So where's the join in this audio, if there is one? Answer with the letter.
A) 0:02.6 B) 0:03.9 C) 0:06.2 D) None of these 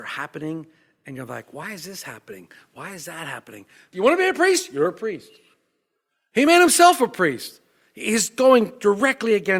B